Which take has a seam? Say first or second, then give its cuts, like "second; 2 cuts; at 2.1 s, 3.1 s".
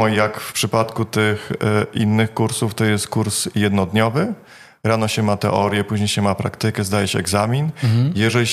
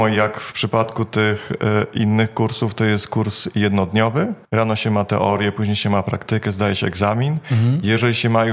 second; 1 cut; at 4.4 s